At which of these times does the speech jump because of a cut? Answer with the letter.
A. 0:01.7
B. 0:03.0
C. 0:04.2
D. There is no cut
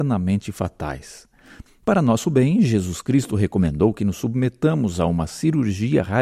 A